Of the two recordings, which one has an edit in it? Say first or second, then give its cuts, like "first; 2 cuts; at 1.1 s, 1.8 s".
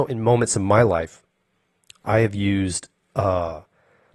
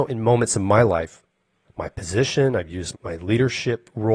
second; 2 cuts; at 1.6 s, 2.9 s